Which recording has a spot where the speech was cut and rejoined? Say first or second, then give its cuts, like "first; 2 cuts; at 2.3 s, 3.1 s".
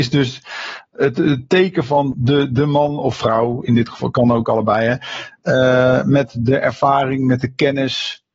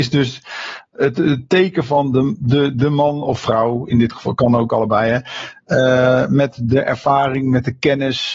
first; 1 cut; at 2.1 s